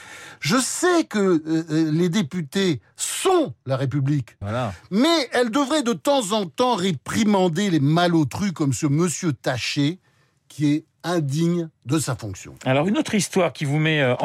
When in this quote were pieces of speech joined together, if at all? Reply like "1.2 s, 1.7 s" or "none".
4.4 s